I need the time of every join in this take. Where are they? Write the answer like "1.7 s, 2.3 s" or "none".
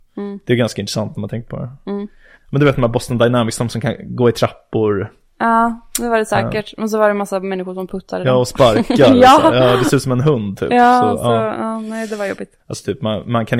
2.3 s, 12.6 s